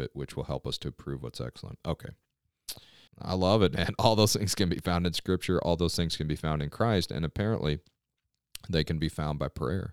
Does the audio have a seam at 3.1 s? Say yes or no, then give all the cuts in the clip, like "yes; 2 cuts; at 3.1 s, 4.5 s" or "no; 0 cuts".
yes; 1 cut; at 3.1 s